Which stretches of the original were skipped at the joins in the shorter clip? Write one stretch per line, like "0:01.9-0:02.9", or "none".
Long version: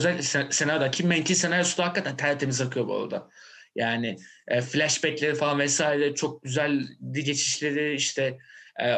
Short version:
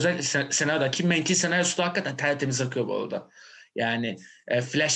none